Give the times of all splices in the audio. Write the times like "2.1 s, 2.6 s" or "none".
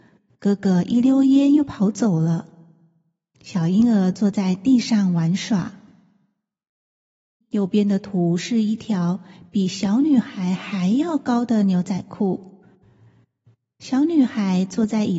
7.4 s